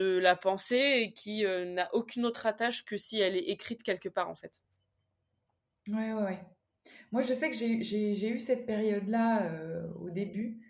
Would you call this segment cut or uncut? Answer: uncut